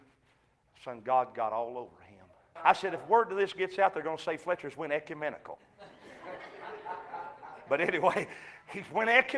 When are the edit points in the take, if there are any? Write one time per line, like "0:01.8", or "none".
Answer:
0:02.6
0:07.7